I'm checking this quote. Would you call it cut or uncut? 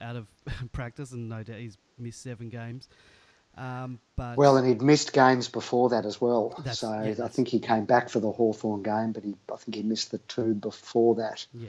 uncut